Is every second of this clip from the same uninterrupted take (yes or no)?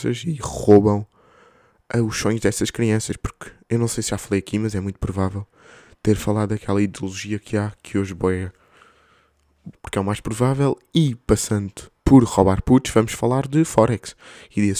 no